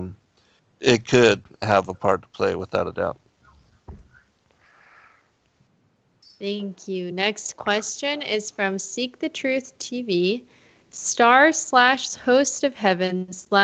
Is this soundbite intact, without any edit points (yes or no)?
yes